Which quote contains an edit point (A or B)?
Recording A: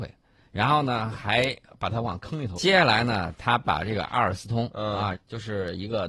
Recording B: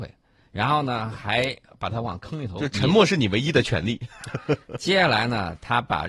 A